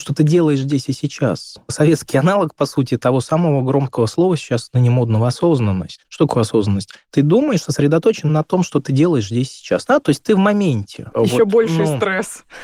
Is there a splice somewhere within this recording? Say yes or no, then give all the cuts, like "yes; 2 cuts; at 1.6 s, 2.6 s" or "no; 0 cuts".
yes; 2 cuts; at 9.9 s, 11.1 s